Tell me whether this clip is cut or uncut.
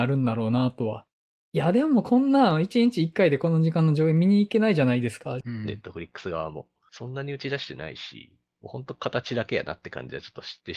cut